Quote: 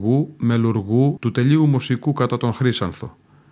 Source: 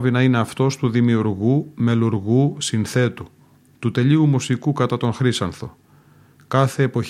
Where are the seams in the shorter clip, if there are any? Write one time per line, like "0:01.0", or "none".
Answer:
0:01.2